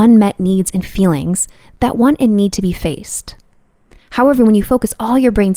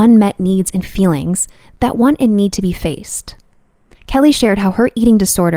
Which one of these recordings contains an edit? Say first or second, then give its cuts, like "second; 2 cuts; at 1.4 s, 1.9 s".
second; 1 cut; at 4.0 s